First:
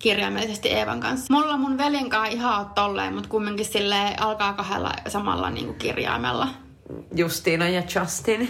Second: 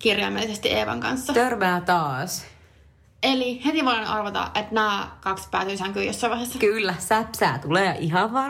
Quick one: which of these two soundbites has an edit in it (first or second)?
first